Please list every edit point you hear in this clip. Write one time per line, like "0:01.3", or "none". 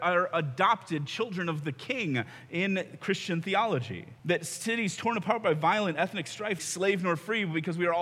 0:04.2
0:06.6